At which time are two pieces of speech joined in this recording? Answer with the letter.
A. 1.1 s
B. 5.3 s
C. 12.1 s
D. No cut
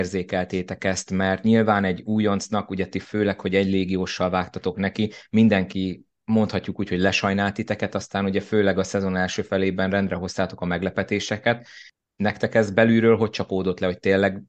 D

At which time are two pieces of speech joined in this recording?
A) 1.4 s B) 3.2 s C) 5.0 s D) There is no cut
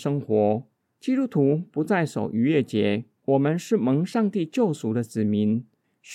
B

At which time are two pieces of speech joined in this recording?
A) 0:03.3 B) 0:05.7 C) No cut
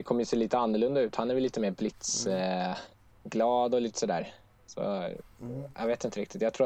C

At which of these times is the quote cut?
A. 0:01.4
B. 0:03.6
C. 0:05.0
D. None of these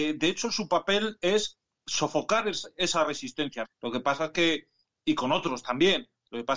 B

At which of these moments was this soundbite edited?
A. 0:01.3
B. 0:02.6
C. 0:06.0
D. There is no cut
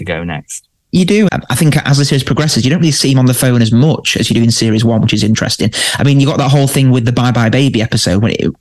A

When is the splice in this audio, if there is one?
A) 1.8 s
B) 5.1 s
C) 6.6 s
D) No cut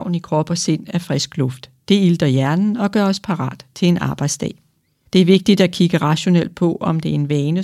B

